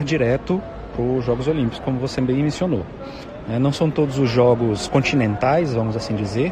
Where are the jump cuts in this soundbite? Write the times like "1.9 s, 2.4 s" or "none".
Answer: none